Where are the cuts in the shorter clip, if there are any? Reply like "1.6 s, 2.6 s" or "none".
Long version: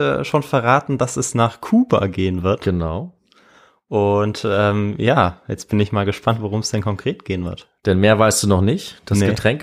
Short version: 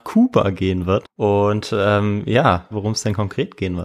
1.0 s, 2.7 s